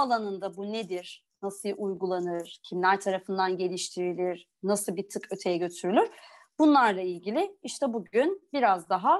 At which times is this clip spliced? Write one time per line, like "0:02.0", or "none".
none